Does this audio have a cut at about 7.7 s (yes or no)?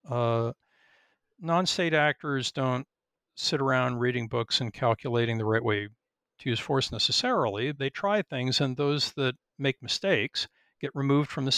yes